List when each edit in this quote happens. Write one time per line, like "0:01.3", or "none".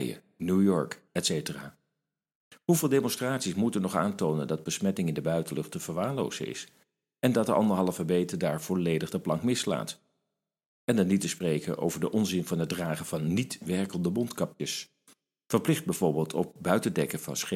0:01.1